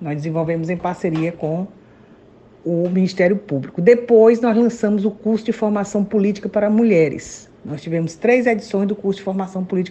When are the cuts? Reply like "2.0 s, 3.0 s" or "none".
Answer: none